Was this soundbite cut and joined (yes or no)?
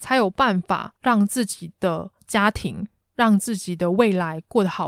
no